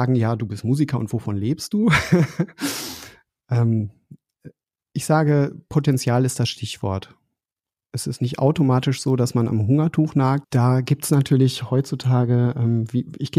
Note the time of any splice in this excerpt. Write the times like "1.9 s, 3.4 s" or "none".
10.4 s

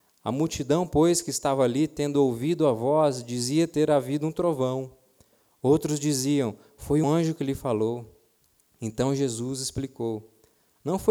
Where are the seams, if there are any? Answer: 7.0 s

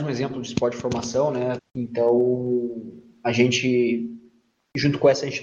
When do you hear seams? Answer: 1.6 s

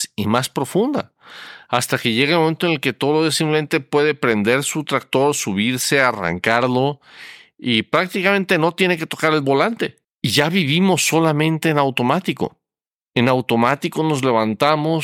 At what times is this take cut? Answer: 10.0 s

